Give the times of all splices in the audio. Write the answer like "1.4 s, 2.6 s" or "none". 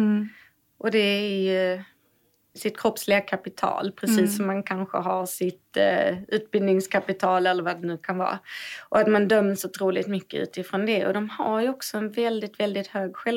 none